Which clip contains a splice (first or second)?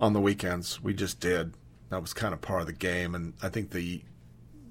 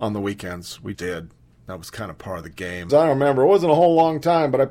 second